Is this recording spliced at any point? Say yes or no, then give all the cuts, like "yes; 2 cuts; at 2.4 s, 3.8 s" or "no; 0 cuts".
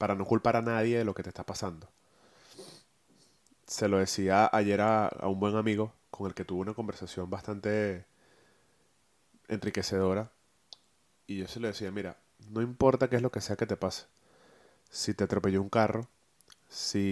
no; 0 cuts